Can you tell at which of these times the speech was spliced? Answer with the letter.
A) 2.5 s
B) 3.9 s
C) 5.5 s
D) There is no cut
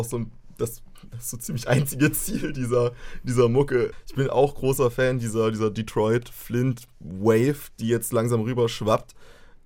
B